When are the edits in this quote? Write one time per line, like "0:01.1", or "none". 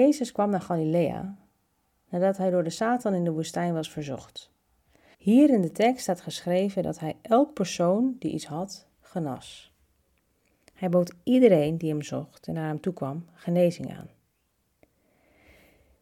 0:05.1